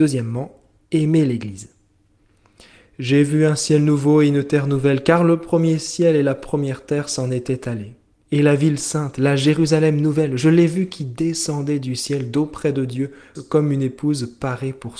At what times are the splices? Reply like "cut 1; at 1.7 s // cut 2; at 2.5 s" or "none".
cut 1; at 13.4 s